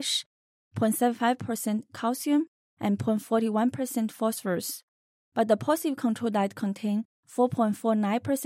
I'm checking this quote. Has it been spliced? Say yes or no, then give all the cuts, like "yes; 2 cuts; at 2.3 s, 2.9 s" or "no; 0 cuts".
no; 0 cuts